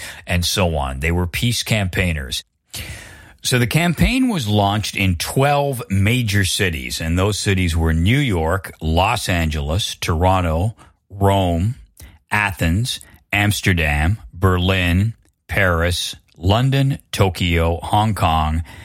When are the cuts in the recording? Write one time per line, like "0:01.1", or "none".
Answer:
none

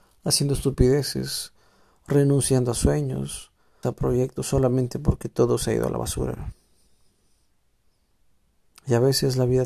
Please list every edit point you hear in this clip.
0:03.8

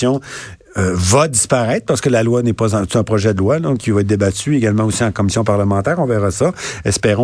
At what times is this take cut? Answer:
none

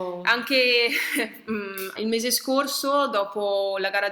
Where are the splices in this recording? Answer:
0:02.0

